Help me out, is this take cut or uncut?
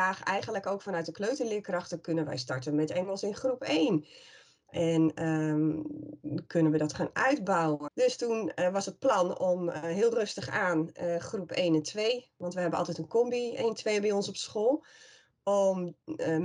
cut